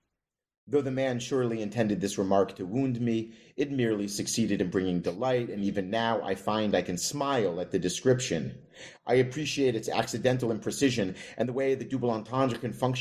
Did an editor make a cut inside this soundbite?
no; 0 cuts

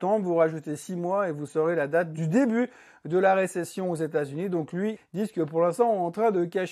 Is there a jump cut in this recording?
yes; 1 cut; at 5.0 s

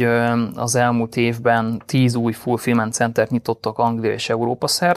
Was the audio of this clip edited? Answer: no; 0 cuts

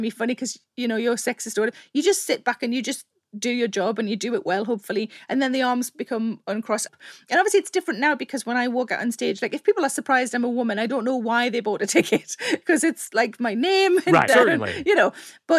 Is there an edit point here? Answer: yes; 1 cut; at 14.3 s

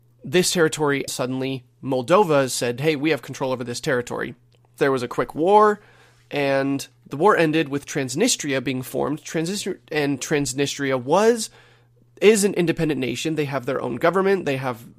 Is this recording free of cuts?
no; 2 cuts; at 1.1 s, 4.8 s

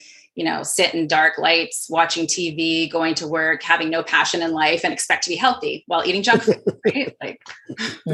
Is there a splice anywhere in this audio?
no; 0 cuts

